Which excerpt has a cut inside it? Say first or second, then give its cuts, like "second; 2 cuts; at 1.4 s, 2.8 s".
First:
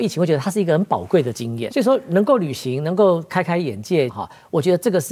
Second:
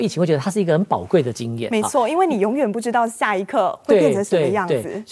first; 2 cuts; at 1.7 s, 4.1 s